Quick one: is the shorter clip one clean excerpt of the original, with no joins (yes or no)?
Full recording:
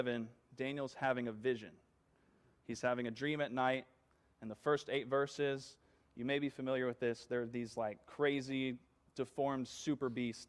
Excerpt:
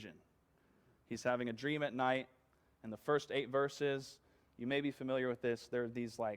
yes